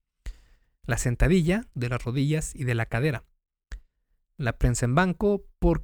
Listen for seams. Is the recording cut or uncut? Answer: cut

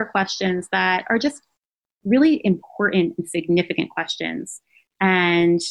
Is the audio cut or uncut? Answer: uncut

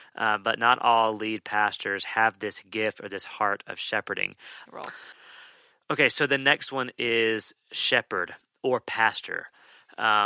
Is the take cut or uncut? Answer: cut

